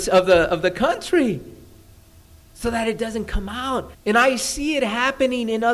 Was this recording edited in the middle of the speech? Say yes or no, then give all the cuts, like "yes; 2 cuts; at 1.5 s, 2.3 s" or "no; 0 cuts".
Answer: yes; 1 cut; at 3.9 s